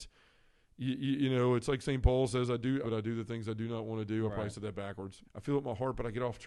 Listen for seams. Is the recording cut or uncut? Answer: cut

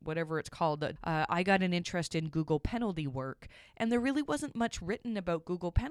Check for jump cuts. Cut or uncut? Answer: cut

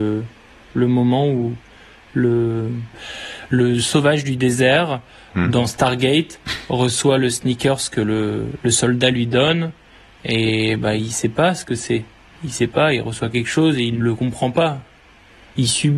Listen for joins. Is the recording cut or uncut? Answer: cut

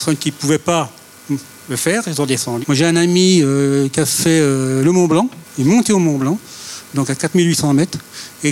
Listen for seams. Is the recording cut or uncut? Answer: cut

